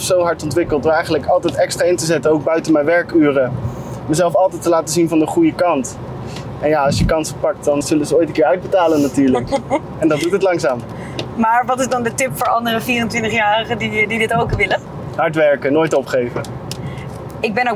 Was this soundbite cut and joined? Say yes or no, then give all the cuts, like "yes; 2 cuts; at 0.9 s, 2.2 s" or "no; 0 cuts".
yes; 1 cut; at 7.8 s